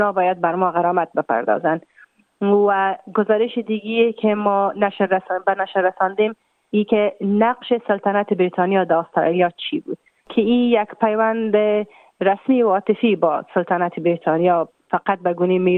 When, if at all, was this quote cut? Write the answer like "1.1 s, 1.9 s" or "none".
none